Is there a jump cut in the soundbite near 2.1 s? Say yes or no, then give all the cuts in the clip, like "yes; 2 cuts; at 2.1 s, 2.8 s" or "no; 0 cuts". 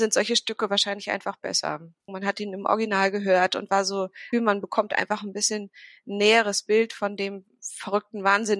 yes; 2 cuts; at 2.1 s, 4.3 s